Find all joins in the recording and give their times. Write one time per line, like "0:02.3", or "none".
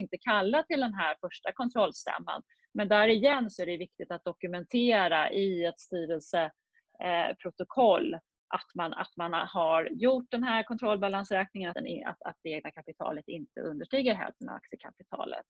0:11.7